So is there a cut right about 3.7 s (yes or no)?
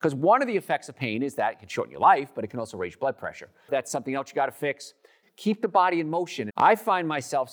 yes